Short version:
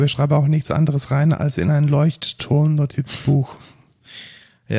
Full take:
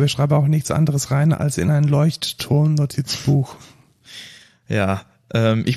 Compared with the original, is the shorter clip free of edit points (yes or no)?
yes